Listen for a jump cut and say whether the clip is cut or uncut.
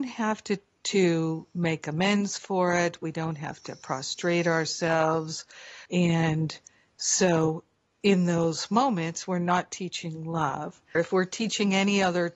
cut